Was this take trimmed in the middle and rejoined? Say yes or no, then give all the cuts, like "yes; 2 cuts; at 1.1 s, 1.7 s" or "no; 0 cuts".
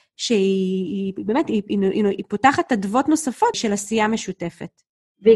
yes; 1 cut; at 3.5 s